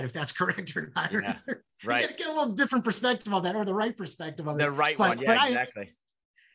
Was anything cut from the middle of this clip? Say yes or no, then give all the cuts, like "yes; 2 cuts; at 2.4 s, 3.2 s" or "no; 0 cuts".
no; 0 cuts